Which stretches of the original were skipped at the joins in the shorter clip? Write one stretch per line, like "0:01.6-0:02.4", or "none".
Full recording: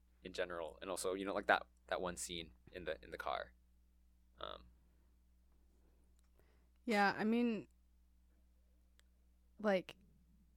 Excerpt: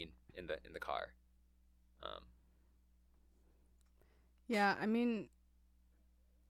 none